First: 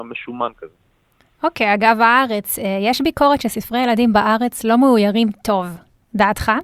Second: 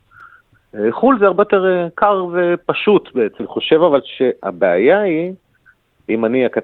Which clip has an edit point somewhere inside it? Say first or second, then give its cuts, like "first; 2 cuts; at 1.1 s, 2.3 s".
second; 1 cut; at 3.4 s